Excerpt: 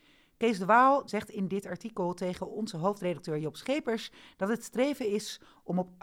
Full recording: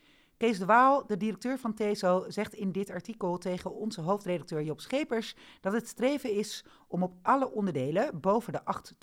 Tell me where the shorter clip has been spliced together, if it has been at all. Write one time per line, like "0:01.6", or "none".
0:01.1